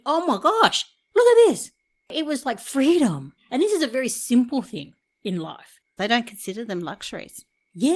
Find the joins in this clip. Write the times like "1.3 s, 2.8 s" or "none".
3.4 s, 6.0 s